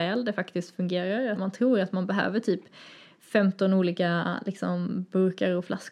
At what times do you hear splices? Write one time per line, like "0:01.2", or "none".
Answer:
0:01.3